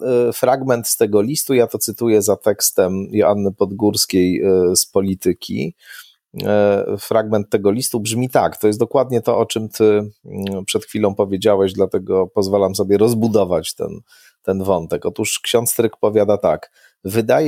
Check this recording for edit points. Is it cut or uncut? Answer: uncut